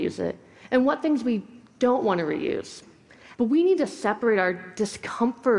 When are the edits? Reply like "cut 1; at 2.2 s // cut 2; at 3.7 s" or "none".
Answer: cut 1; at 3.3 s